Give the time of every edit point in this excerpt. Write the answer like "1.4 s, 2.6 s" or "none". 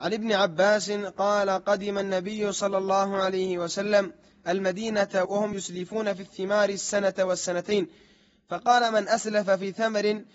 none